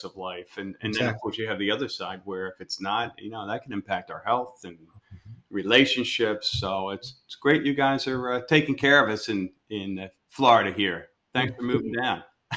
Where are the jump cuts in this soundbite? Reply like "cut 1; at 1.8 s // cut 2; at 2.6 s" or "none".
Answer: none